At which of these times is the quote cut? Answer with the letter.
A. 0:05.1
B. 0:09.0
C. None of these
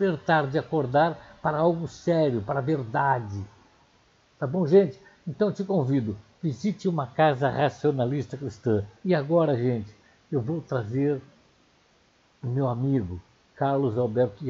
B